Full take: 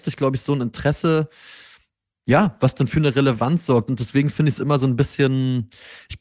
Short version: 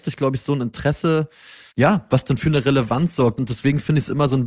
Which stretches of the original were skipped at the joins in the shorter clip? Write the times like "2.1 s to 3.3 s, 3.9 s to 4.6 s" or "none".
1.7 s to 2.2 s